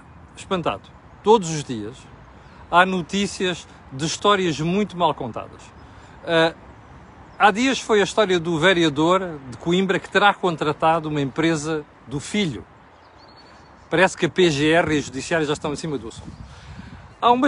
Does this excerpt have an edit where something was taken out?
no; 0 cuts

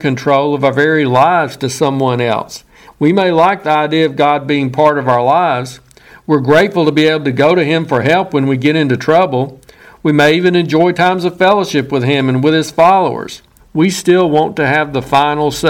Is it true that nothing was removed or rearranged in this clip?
no; 2 cuts; at 2.9 s, 13.6 s

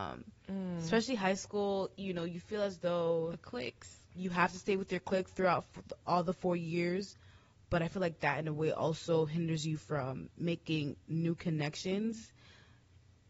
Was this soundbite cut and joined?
no; 0 cuts

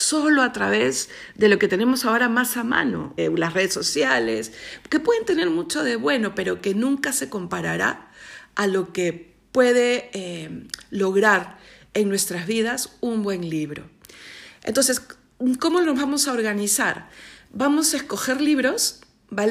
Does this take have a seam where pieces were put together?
yes; 1 cut; at 3.2 s

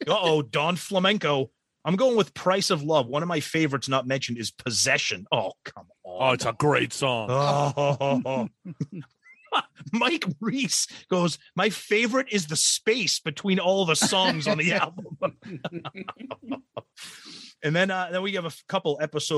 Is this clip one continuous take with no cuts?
yes; 0 cuts

